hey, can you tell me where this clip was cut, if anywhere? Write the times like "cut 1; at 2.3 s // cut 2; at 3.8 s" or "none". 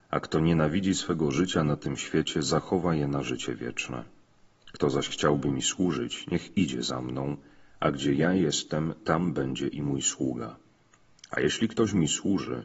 none